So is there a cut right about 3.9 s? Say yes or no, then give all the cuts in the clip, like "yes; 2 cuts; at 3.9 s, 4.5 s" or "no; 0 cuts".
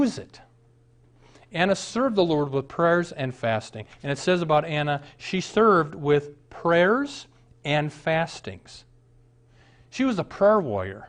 yes; 1 cut; at 3.9 s